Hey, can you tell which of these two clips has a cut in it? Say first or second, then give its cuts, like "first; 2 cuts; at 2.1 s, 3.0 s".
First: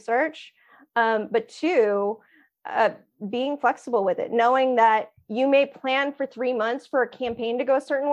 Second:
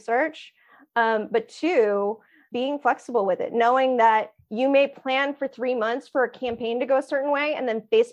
second; 1 cut; at 2.5 s